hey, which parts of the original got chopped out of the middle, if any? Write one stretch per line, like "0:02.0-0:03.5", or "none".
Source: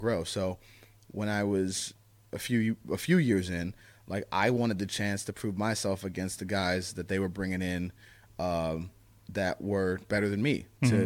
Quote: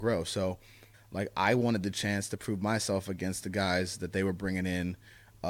0:00.9-0:03.9

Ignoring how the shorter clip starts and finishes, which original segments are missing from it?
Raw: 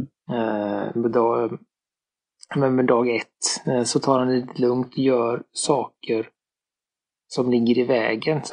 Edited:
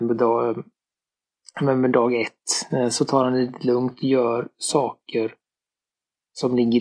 none

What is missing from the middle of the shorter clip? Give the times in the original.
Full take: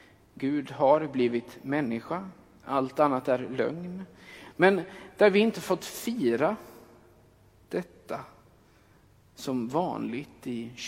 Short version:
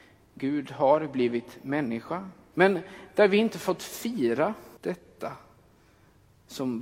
0:02.5-0:04.5
0:06.8-0:07.6

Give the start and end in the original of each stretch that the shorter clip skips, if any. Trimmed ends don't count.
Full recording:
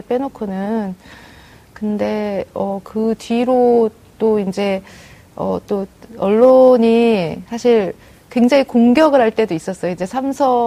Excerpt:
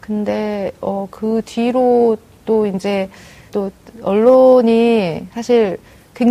0:05.2-0:05.6

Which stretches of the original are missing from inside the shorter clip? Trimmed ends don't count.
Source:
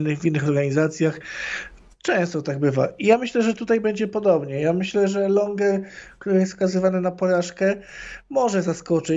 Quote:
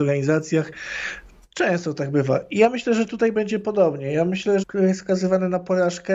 0:05.1-0:06.1

